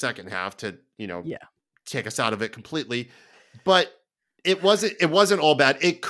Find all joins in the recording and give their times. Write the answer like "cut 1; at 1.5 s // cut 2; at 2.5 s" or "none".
none